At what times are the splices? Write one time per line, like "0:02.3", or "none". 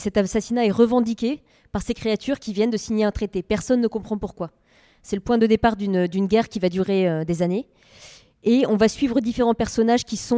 none